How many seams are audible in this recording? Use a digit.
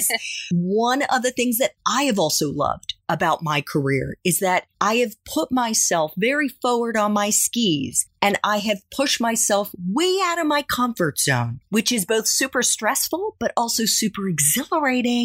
0